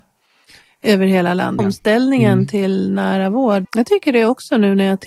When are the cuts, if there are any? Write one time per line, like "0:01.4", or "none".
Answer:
0:01.6
0:03.6